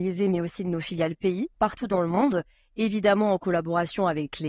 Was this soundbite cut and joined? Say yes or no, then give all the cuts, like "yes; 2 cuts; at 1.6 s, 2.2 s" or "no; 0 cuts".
yes; 1 cut; at 1.5 s